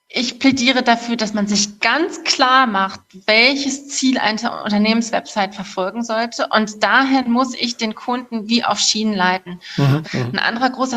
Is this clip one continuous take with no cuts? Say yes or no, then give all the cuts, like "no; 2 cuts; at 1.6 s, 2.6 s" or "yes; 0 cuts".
no; 1 cut; at 10.0 s